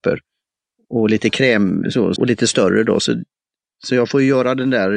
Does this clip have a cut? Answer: yes; 1 cut; at 2.2 s

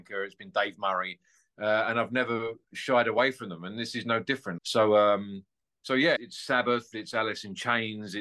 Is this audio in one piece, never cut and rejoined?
no; 2 cuts; at 4.6 s, 6.2 s

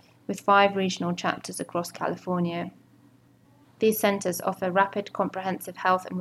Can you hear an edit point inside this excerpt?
yes; 1 cut; at 3.6 s

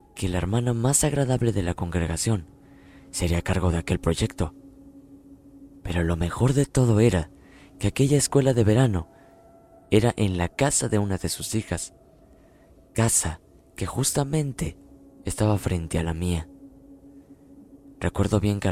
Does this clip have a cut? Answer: no; 0 cuts

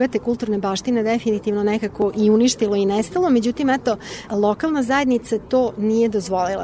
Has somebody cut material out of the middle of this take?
no; 0 cuts

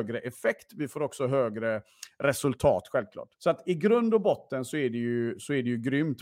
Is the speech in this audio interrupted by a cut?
yes; 1 cut; at 3.3 s

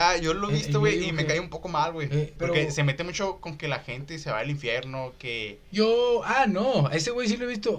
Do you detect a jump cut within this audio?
yes; 1 cut; at 2.4 s

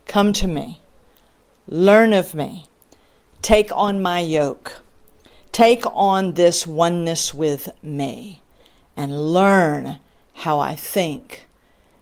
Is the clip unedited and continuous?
yes; 0 cuts

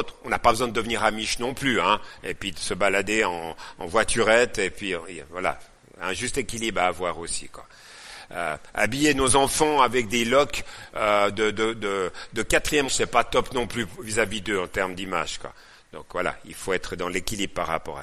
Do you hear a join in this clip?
yes; 1 cut; at 12.9 s

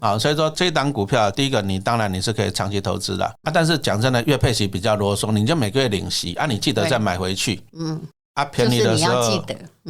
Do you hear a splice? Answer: yes; 2 cuts; at 1.3 s, 3.4 s

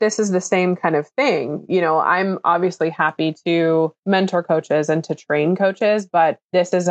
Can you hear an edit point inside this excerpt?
no; 0 cuts

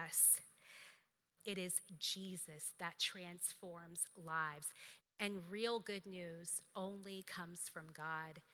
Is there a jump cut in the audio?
yes; 2 cuts; at 1.4 s, 5.0 s

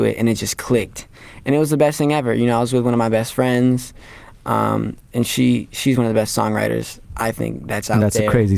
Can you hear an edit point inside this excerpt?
yes; 1 cut; at 7.0 s

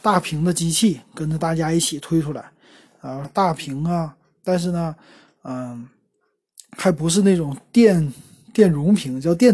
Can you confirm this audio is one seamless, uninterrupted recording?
no; 1 cut; at 3.2 s

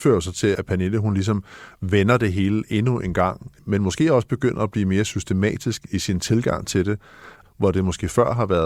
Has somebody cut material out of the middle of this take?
no; 0 cuts

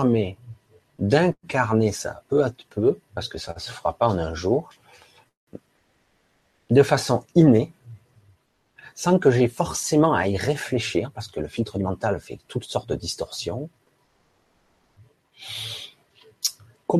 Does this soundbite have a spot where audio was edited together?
no; 0 cuts

